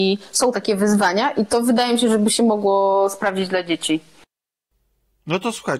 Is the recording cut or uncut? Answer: uncut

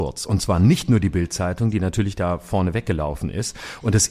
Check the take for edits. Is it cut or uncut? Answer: uncut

